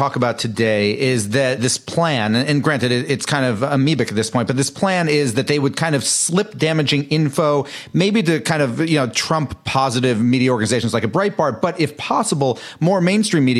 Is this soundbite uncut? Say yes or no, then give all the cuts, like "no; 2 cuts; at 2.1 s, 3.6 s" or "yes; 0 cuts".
yes; 0 cuts